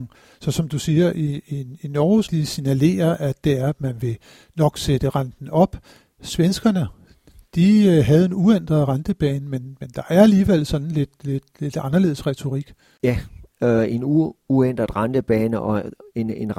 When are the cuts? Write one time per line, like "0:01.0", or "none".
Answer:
0:02.2

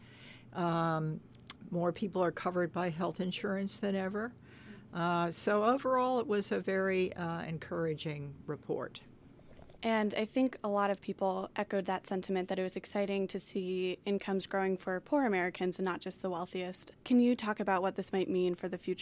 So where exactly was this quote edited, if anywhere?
0:17.0

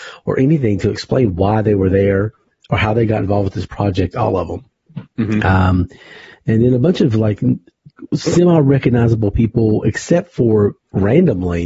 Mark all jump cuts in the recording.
0:05.0

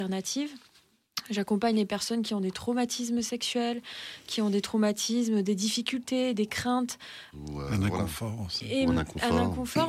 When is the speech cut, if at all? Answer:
0:07.3

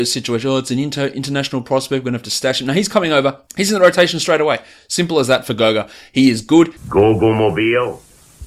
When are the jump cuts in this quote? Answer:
0:03.5
0:06.8

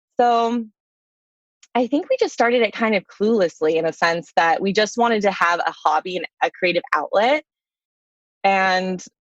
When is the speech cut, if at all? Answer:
none

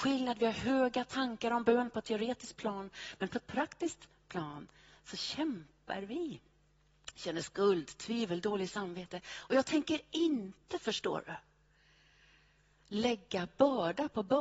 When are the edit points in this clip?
none

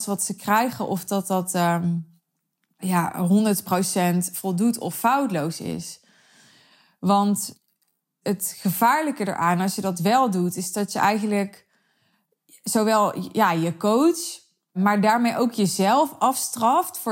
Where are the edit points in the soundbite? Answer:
none

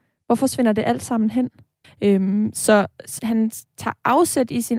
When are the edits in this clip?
0:01.8
0:03.2

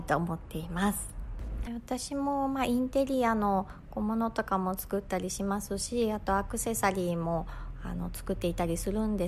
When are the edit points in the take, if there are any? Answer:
0:01.7

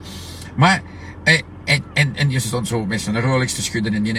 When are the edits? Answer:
none

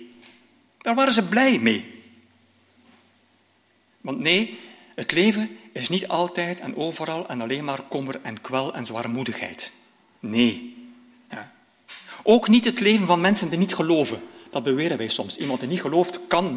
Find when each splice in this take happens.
none

